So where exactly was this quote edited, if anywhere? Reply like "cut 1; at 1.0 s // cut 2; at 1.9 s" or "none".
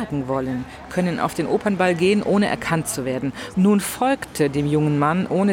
cut 1; at 3.5 s